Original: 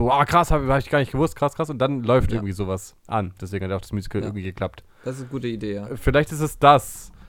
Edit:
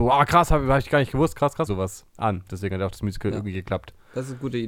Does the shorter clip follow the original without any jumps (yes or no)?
no